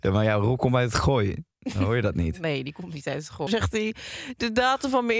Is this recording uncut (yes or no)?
no